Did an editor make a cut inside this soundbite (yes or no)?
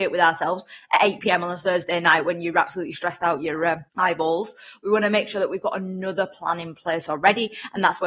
yes